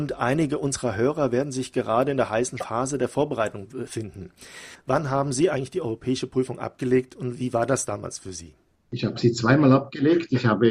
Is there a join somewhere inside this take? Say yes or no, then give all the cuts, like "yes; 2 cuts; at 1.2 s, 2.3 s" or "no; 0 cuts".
yes; 1 cut; at 4.7 s